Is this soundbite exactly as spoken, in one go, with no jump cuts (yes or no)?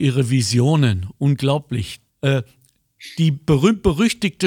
no